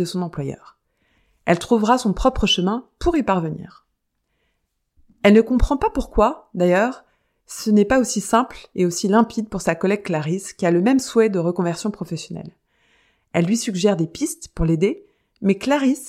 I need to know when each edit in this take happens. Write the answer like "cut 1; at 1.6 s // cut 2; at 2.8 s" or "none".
none